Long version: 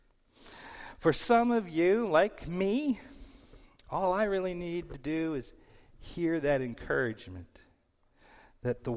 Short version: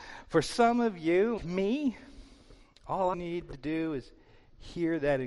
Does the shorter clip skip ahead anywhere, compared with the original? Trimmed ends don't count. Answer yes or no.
yes